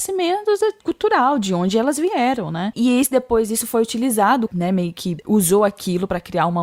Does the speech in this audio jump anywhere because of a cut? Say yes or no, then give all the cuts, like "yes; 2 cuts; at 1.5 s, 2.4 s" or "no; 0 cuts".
yes; 2 cuts; at 2.7 s, 4.5 s